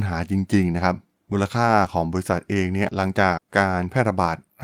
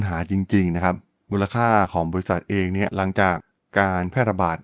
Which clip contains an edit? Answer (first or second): first